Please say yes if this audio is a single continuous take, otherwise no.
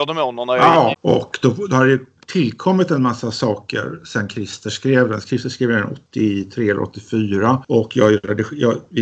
no